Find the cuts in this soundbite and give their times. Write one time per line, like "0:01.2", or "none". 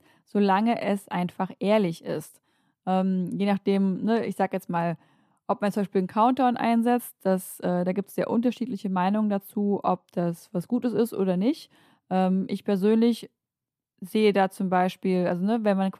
none